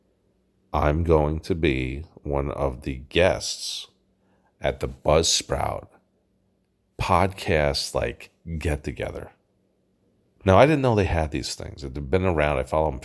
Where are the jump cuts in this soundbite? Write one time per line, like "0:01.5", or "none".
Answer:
none